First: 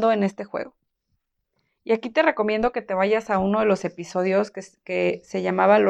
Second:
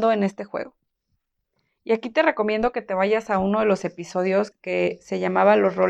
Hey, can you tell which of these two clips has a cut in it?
second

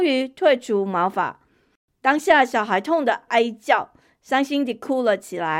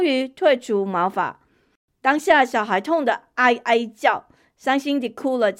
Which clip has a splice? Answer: first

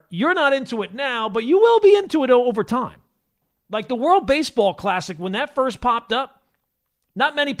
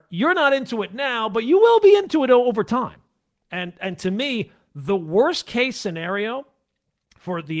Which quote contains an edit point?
second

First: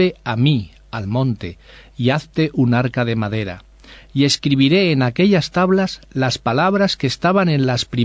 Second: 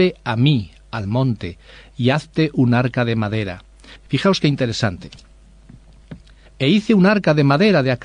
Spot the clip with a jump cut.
second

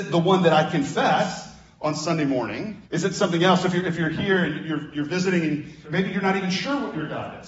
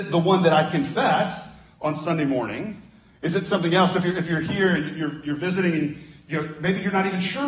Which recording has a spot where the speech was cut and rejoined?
first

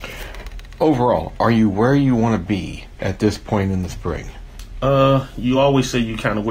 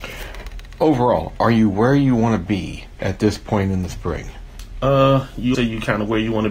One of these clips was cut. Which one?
second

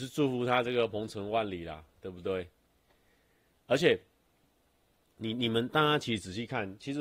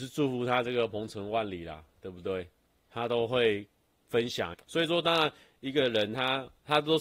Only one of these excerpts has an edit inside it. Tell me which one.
second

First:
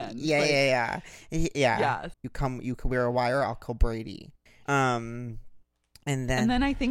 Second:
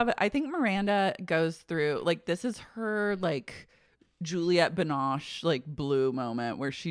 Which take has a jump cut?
first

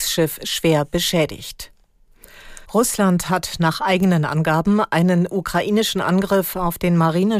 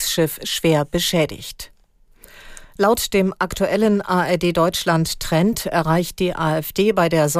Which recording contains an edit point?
first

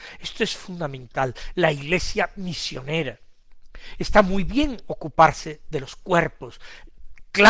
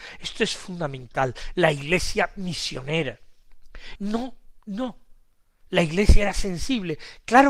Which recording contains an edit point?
second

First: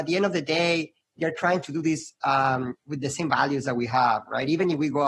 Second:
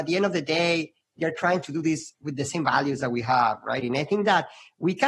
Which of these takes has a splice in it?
second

